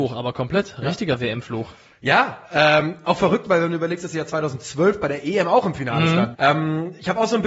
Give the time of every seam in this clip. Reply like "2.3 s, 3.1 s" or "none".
6.3 s